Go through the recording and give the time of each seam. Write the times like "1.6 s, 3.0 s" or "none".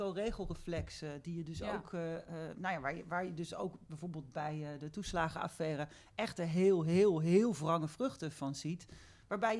none